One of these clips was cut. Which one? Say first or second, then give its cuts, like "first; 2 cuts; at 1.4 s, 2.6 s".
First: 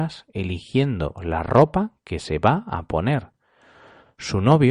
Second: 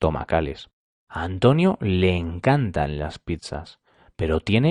second; 1 cut; at 1.1 s